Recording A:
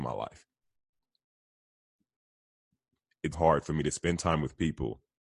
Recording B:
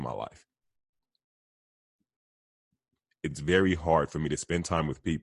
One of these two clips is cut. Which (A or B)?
A